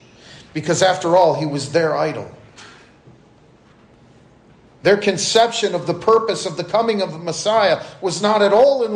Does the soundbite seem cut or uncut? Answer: uncut